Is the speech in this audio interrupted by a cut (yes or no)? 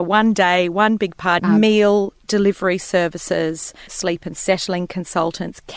yes